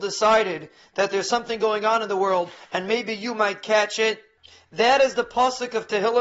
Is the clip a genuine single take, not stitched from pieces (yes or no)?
yes